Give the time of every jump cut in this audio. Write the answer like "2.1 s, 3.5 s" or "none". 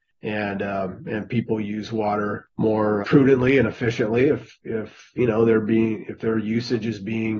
3.0 s

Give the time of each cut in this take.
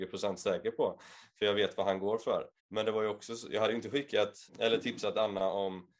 2.6 s, 4.5 s

